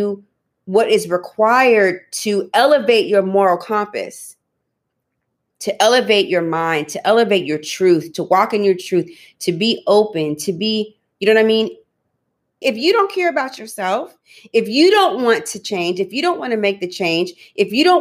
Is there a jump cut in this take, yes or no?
yes